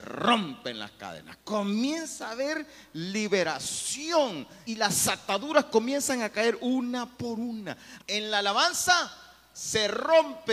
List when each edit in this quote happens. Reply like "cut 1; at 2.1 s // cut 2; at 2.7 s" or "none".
cut 1; at 4.7 s // cut 2; at 8.0 s